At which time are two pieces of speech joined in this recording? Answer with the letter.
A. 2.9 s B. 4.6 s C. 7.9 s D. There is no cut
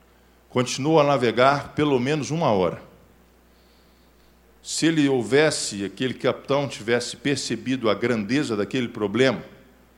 D